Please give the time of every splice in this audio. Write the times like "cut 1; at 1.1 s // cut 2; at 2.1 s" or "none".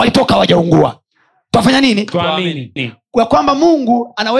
cut 1; at 2.8 s